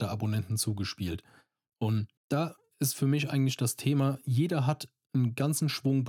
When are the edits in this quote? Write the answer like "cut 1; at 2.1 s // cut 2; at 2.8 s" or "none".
cut 1; at 2.2 s